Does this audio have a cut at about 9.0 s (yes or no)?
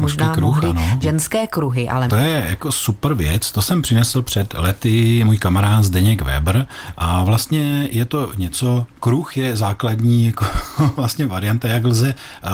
no